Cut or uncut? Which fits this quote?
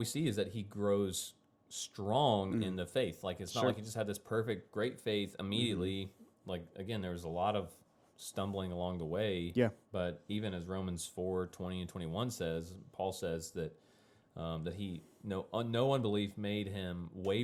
uncut